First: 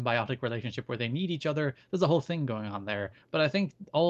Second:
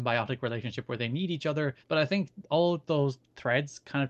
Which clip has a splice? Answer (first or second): second